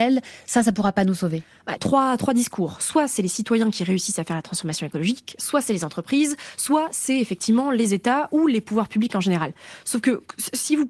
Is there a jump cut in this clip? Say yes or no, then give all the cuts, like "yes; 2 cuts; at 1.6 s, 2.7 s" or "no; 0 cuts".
yes; 1 cut; at 1.8 s